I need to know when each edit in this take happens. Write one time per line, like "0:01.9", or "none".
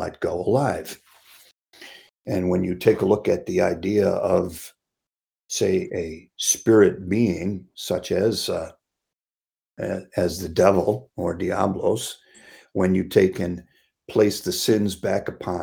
none